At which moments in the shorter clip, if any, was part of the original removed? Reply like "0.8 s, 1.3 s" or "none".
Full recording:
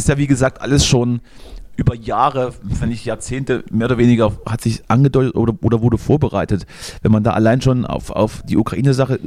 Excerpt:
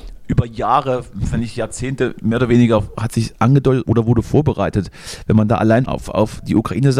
3.8 s, 5.9 s